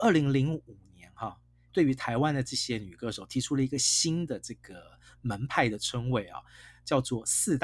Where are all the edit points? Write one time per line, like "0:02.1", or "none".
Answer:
0:01.7